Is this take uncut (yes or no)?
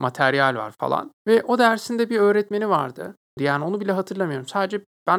no